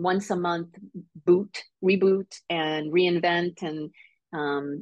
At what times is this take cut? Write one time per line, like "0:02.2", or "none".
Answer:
none